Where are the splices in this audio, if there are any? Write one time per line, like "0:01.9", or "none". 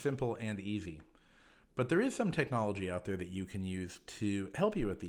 none